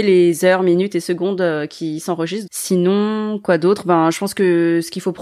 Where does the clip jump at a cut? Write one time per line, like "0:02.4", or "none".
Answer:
0:02.5